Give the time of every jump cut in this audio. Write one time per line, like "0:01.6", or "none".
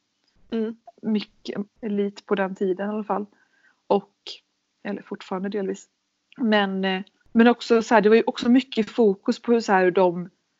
0:01.7